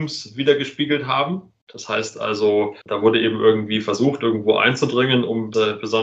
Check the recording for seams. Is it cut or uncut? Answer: uncut